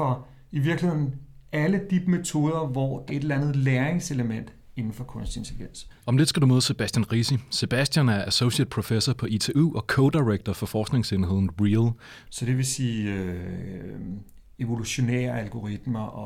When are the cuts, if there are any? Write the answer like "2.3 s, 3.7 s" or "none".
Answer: 3.1 s, 12.2 s